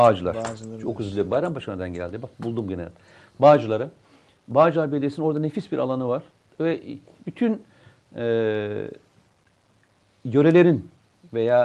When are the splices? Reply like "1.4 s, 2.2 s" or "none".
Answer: none